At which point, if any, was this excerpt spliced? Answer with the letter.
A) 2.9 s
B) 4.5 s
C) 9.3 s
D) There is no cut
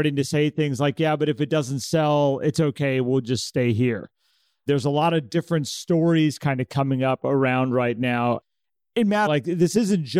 C